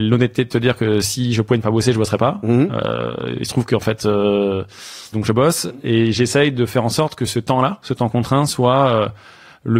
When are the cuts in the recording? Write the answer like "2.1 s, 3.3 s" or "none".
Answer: 5.1 s

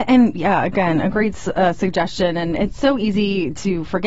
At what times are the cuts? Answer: none

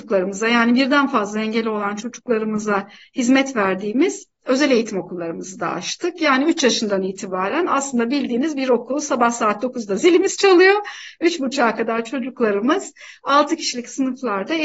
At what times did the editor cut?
none

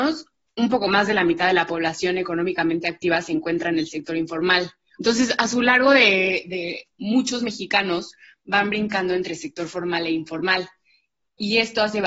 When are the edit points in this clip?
4.9 s, 6.9 s

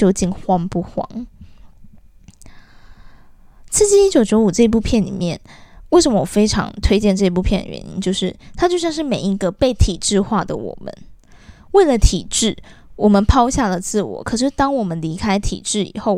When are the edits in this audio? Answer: none

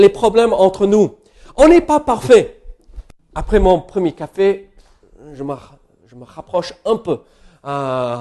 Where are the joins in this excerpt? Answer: 3.2 s

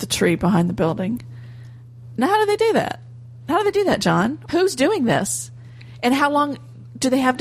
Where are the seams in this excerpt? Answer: 4.5 s

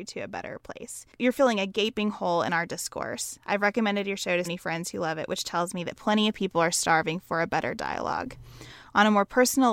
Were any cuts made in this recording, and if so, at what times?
4.4 s

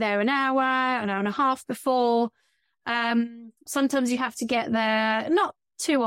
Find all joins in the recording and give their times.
3.7 s

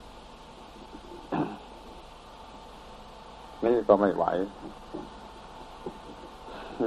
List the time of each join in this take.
none

